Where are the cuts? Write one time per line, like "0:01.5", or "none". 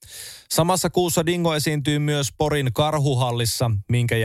none